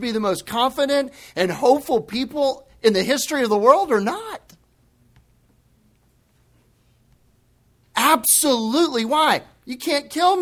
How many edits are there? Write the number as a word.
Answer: zero